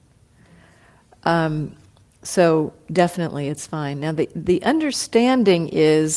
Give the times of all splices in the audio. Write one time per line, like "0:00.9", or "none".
none